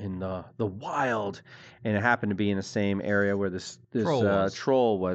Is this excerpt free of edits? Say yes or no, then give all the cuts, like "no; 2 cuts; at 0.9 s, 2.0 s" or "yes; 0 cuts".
no; 1 cut; at 3.8 s